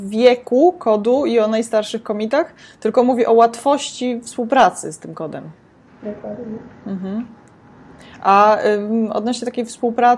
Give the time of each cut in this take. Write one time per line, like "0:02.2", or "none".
none